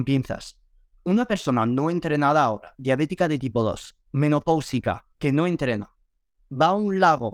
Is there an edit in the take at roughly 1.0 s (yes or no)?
no